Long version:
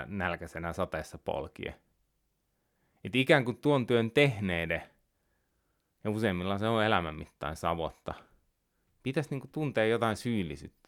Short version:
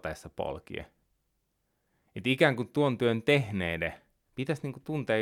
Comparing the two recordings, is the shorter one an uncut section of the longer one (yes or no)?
no